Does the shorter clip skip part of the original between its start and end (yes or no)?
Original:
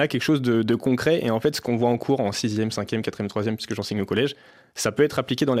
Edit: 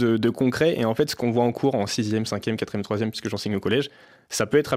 no